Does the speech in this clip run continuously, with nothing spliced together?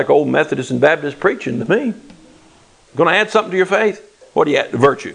no; 1 cut; at 2.9 s

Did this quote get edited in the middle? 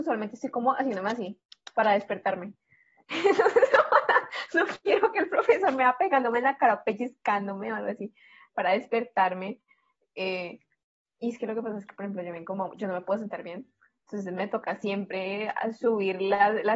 no; 0 cuts

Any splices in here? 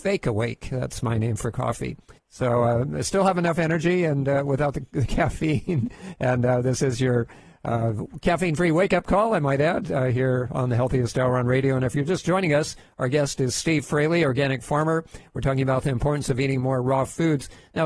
yes; 1 cut; at 2.2 s

